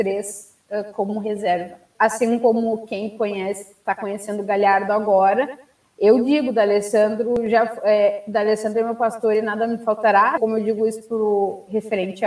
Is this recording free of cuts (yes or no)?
no